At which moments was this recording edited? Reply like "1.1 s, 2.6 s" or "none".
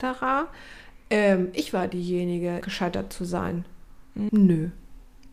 2.6 s, 4.3 s